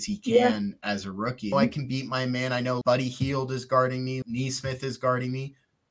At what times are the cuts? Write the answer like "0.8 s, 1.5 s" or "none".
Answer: 1.5 s, 2.8 s, 4.2 s